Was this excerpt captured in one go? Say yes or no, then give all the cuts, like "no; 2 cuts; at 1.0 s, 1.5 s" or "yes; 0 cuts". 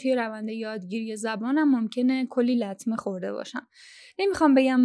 yes; 0 cuts